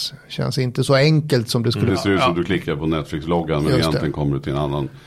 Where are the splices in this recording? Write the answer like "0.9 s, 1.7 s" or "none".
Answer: 1.9 s